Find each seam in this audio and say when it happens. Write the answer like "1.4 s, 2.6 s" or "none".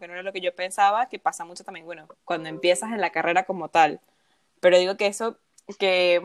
none